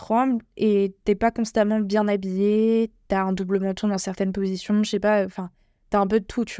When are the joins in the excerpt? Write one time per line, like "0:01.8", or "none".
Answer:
none